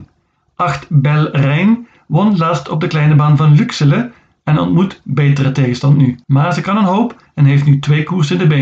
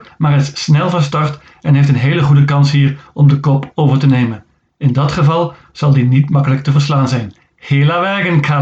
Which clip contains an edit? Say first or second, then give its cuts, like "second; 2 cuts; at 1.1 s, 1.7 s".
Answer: first; 1 cut; at 6.2 s